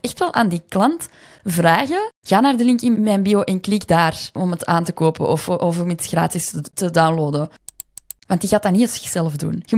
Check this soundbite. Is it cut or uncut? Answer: cut